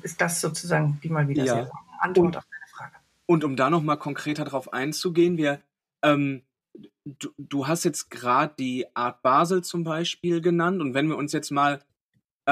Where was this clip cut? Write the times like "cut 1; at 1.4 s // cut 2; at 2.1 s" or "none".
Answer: none